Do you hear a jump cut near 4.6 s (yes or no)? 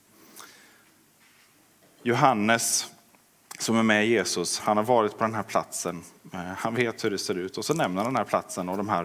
yes